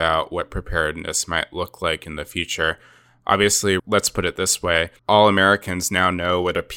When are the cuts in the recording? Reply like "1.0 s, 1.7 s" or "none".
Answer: 3.8 s, 5.0 s